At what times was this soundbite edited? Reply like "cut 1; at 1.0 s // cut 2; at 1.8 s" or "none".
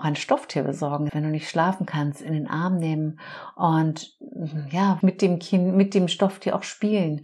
cut 1; at 1.1 s // cut 2; at 5.0 s